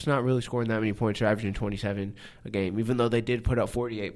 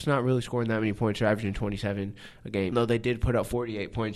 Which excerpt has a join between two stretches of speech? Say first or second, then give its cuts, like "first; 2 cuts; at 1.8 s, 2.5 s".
second; 1 cut; at 2.7 s